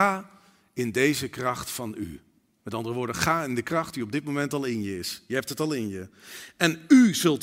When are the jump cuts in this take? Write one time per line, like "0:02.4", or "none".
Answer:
none